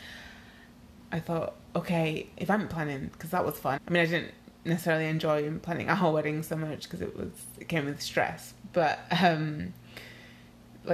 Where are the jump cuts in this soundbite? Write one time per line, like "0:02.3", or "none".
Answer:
0:01.0
0:03.8